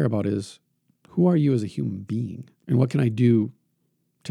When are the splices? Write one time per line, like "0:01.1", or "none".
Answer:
0:02.6

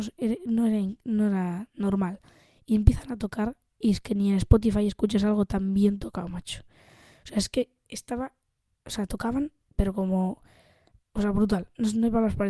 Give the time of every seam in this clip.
none

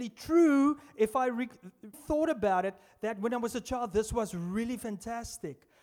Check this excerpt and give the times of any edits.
0:01.9

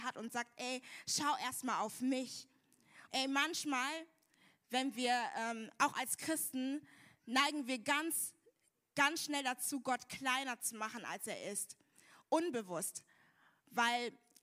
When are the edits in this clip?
0:03.1

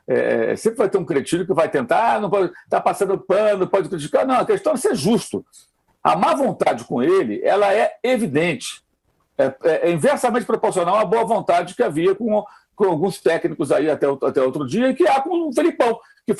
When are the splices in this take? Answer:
none

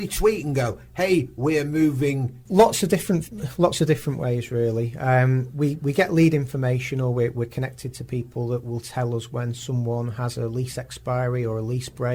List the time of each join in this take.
0:02.5

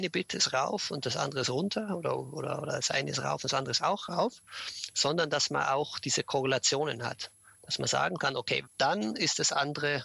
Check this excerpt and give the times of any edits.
0:08.6

